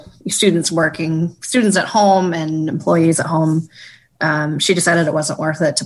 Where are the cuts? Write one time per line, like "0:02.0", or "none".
none